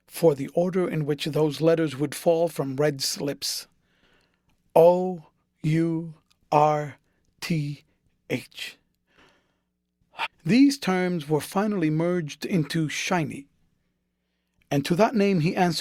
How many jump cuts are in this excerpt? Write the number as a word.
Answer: one